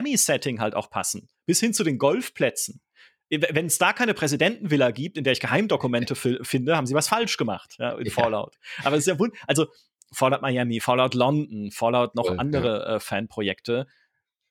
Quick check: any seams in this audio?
no; 0 cuts

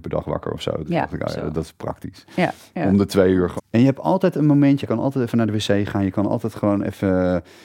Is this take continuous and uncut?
no; 2 cuts; at 3.6 s, 4.8 s

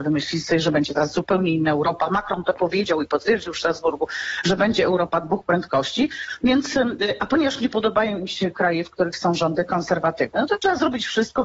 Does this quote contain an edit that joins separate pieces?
no; 0 cuts

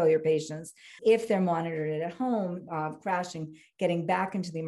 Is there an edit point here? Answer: yes; 2 cuts; at 1.0 s, 2.7 s

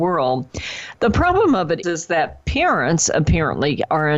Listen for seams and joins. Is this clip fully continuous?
no; 1 cut; at 1.8 s

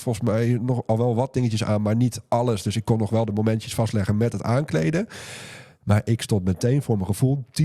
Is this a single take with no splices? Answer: yes; 0 cuts

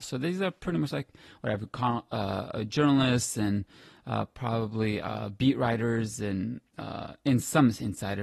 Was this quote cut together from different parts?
no; 0 cuts

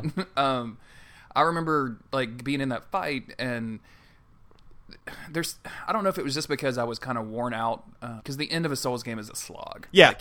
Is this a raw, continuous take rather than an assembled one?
no; 2 cuts; at 8.2 s, 9.3 s

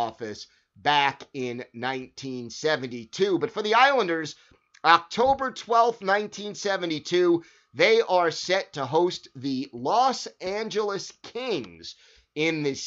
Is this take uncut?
yes; 0 cuts

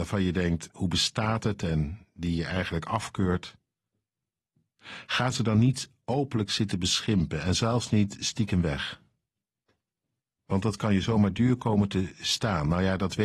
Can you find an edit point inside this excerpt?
no; 0 cuts

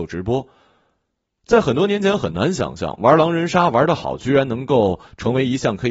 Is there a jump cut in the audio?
no; 0 cuts

